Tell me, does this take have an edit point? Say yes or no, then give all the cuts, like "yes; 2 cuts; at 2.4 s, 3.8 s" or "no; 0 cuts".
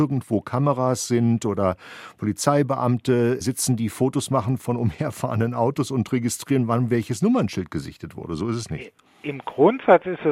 no; 0 cuts